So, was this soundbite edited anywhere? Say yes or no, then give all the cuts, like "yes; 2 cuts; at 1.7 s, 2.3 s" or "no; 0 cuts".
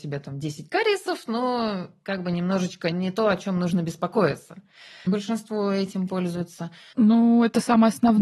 yes; 2 cuts; at 5.1 s, 6.9 s